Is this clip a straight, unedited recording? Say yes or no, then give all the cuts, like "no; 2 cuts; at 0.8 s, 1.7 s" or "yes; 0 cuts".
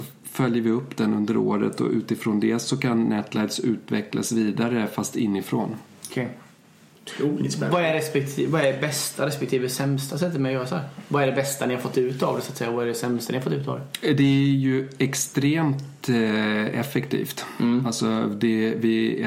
yes; 0 cuts